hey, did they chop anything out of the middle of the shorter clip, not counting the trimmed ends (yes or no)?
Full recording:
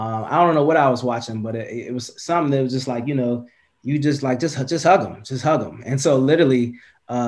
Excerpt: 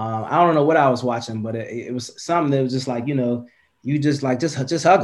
no